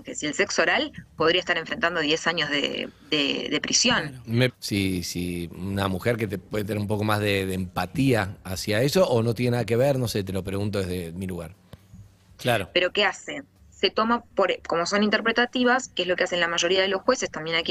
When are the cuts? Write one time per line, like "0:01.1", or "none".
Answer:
0:04.5
0:12.4

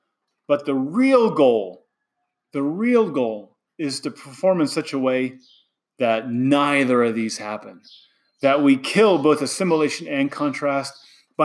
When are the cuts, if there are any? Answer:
none

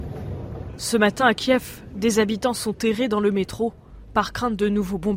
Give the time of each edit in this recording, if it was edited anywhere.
none

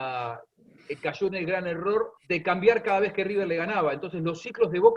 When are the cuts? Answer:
0:02.2

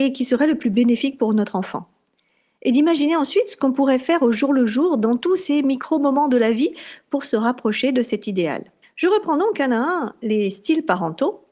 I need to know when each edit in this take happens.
none

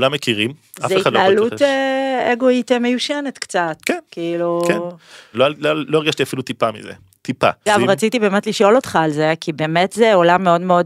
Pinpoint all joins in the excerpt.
0:05.3
0:07.7

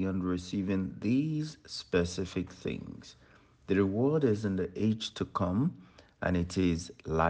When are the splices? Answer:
none

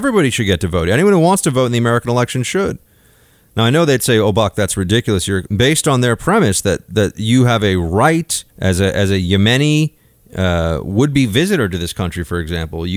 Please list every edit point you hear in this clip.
0:05.5
0:08.5

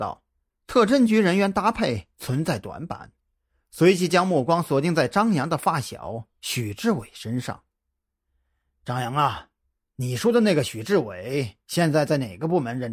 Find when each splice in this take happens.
none

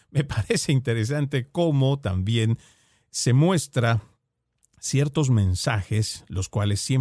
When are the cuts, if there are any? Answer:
none

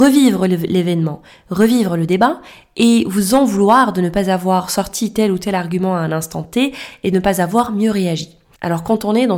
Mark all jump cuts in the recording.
none

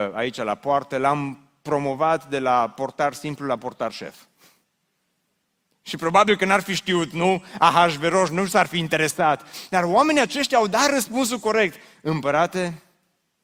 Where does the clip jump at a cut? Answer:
none

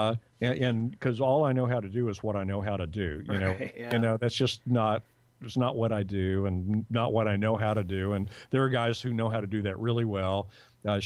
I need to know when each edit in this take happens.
0:03.7

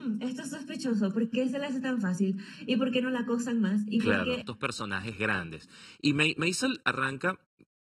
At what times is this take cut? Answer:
0:04.4

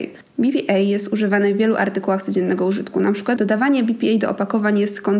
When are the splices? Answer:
0:03.4

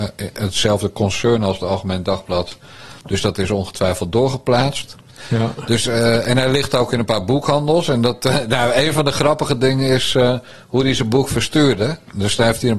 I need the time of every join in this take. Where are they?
none

